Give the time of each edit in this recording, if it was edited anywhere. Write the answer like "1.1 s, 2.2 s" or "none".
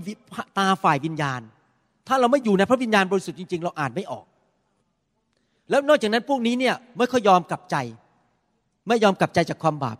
none